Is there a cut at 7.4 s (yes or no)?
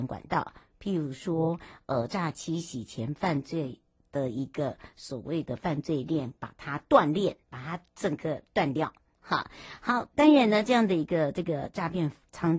yes